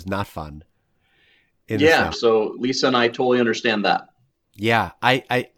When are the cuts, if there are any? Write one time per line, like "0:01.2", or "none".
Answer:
0:02.1